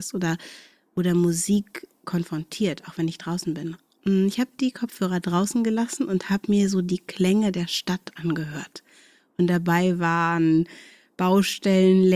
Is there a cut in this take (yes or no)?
no